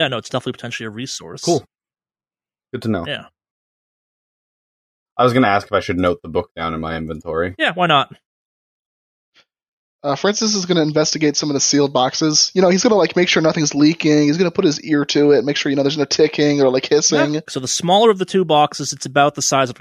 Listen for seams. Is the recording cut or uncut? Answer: cut